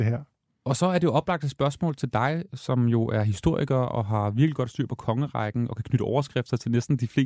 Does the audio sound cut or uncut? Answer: uncut